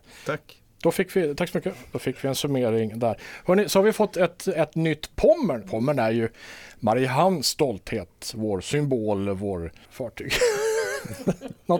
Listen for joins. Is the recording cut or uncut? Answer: cut